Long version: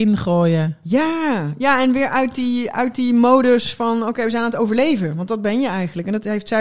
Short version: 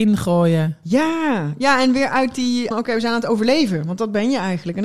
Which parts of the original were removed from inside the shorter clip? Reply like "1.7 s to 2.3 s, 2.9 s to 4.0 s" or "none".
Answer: 2.7 s to 4.0 s